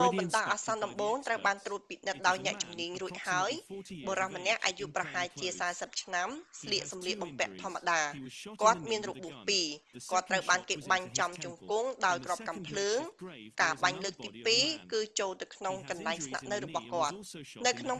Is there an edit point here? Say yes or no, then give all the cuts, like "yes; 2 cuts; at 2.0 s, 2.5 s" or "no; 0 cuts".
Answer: no; 0 cuts